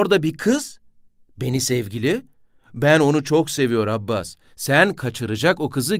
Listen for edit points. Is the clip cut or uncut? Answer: uncut